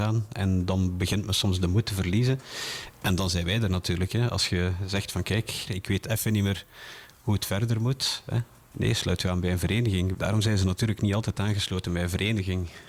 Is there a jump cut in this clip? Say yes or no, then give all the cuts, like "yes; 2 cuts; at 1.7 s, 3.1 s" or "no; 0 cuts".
yes; 3 cuts; at 5.7 s, 8.7 s, 10.1 s